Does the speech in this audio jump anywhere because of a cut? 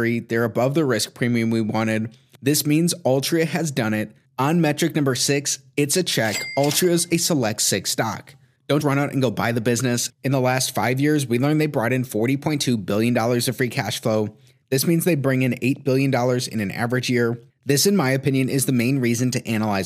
yes; 3 cuts; at 8.8 s, 10.1 s, 17.5 s

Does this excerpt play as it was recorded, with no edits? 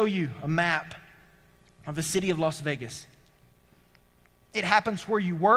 no; 1 cut; at 4.5 s

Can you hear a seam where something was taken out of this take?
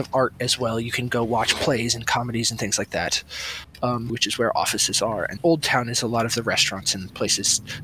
yes; 2 cuts; at 4.1 s, 5.4 s

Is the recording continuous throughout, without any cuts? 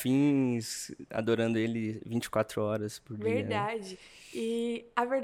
yes; 0 cuts

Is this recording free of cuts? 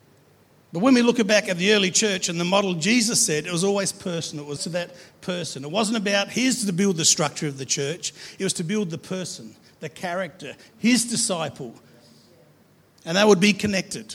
no; 1 cut; at 4.6 s

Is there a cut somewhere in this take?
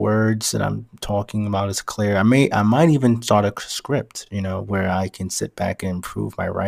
no; 0 cuts

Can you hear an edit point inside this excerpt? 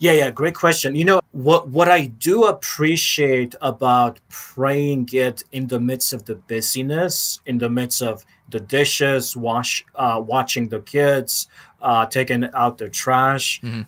yes; 1 cut; at 1.2 s

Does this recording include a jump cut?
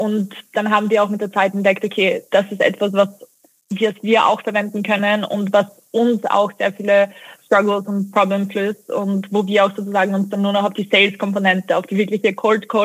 no; 0 cuts

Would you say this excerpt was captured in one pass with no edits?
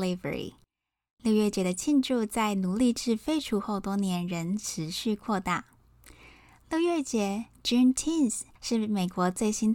no; 1 cut; at 1.1 s

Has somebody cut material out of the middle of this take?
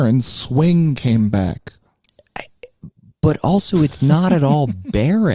no; 0 cuts

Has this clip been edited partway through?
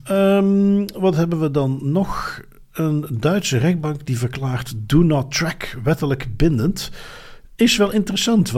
no; 0 cuts

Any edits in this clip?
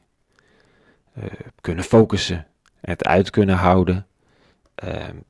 no; 0 cuts

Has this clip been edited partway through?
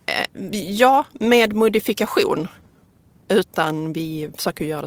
yes; 1 cut; at 3.1 s

